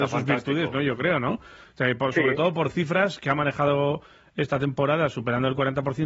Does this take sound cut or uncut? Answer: uncut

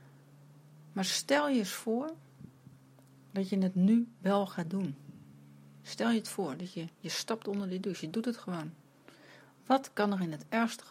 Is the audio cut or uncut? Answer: uncut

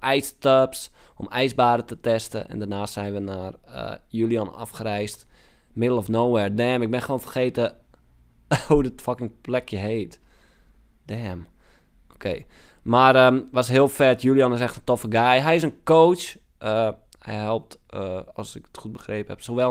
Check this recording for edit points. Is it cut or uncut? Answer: uncut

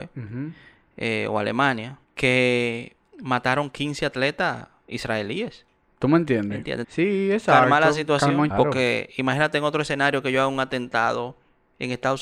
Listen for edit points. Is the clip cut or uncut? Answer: cut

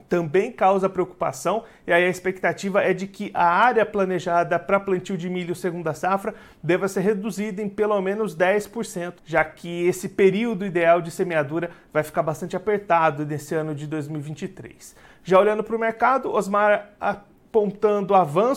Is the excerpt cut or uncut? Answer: cut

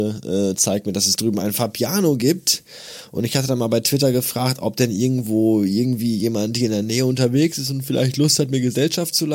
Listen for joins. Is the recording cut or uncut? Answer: uncut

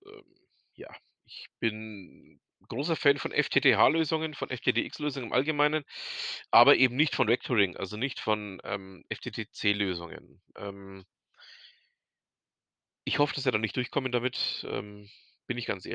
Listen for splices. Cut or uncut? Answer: uncut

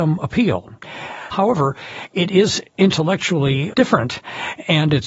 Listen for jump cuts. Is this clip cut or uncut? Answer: cut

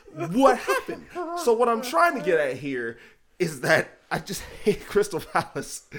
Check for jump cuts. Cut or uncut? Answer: uncut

